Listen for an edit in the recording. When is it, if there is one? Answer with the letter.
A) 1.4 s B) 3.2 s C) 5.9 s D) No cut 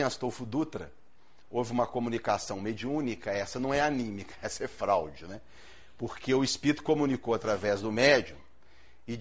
D